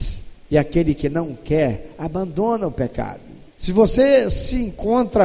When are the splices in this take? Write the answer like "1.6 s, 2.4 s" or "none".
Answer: 3.5 s